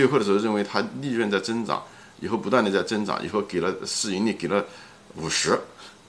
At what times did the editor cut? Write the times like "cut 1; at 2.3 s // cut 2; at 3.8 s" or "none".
none